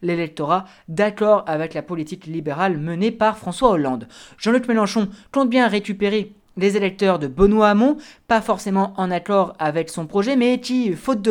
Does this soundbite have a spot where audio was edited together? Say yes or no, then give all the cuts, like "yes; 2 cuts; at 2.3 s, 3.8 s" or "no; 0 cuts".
no; 0 cuts